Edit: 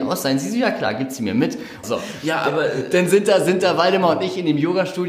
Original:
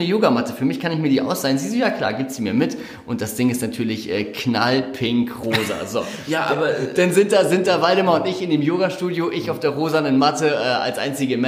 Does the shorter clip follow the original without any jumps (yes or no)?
no